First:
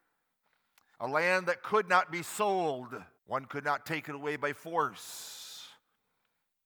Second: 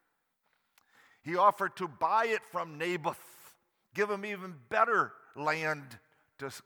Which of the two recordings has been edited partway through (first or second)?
first